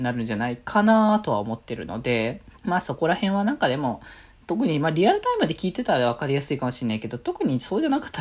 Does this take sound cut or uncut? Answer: cut